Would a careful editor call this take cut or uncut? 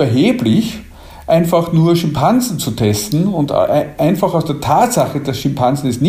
uncut